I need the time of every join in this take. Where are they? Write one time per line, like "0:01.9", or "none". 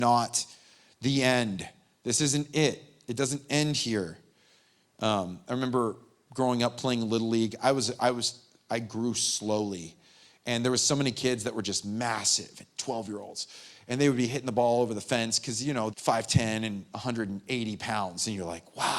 0:15.9